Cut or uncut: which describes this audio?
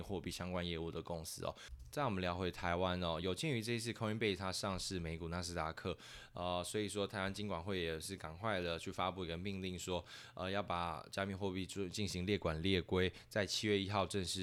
uncut